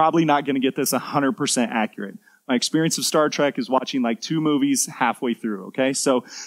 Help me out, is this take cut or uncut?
uncut